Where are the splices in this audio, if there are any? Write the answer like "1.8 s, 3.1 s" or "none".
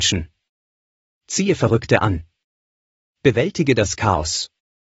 none